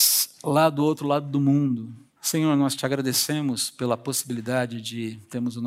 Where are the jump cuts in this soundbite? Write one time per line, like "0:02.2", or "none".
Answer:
0:02.2